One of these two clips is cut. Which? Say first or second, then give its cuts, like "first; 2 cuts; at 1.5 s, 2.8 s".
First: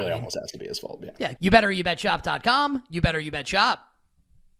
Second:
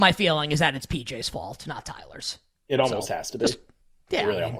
first; 1 cut; at 1.4 s